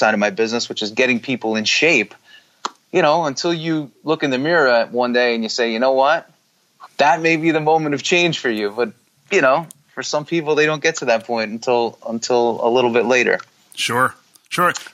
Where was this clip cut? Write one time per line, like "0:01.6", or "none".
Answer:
0:06.8

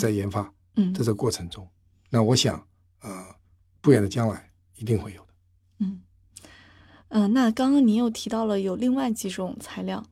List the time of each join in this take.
none

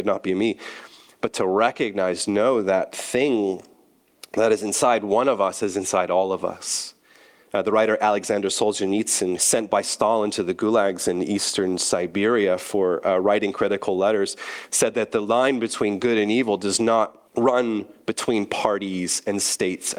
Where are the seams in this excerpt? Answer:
0:09.4
0:17.2

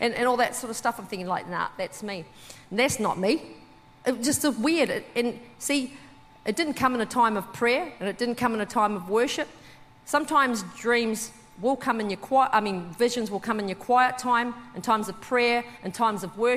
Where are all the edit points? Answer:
none

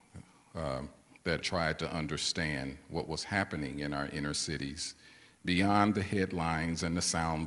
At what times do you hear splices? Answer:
0:01.4

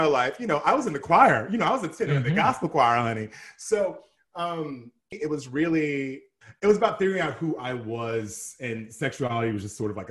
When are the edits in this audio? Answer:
0:05.1

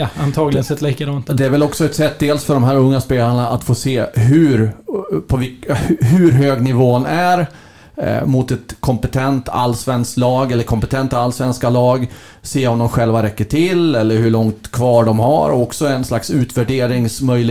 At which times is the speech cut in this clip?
none

